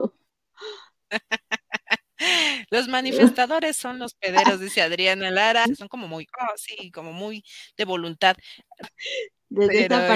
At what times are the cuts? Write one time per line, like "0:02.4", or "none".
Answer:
0:05.7
0:08.8